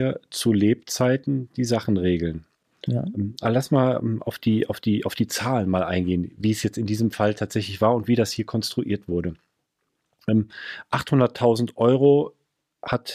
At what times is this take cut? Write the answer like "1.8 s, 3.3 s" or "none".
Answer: none